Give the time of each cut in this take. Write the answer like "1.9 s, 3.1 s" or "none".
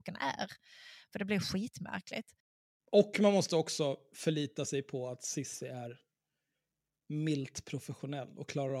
none